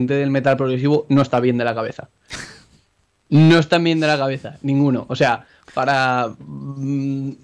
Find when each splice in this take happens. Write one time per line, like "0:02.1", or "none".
none